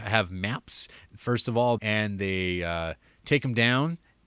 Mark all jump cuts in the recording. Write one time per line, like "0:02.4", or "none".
0:01.8